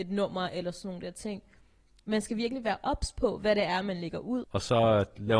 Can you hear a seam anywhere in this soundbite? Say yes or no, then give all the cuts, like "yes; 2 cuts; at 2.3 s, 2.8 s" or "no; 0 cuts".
yes; 1 cut; at 4.4 s